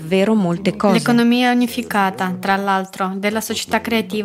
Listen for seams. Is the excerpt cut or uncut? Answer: uncut